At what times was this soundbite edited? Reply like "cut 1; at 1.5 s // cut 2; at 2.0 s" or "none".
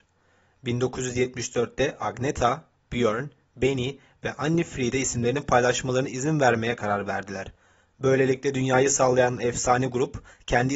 none